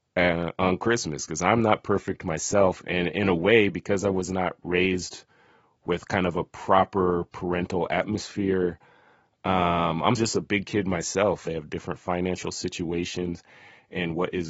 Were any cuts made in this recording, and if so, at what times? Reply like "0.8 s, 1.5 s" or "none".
10.2 s, 11.5 s